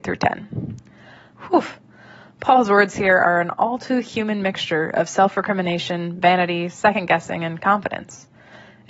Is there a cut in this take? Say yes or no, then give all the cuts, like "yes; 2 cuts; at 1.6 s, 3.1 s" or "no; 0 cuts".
yes; 1 cut; at 1.3 s